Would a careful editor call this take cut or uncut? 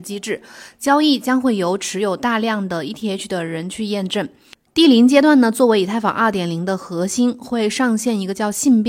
cut